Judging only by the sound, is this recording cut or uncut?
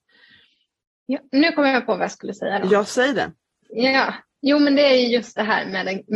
uncut